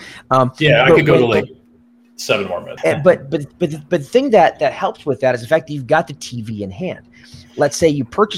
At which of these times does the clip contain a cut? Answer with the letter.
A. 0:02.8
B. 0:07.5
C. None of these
A